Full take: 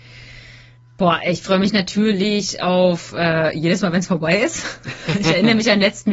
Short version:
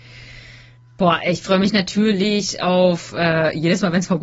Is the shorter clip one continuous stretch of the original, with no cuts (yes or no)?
yes